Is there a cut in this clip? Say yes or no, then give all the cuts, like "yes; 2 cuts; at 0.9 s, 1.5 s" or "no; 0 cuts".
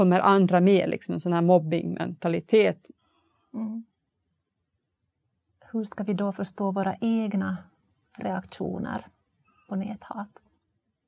no; 0 cuts